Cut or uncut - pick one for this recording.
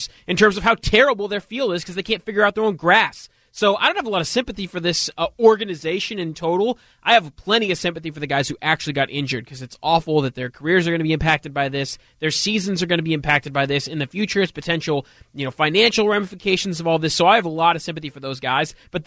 uncut